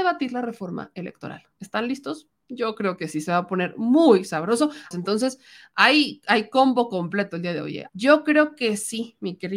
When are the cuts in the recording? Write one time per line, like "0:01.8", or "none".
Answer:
0:04.9
0:07.9